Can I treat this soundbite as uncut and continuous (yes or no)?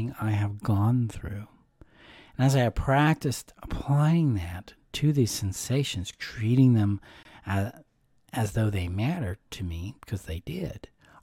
yes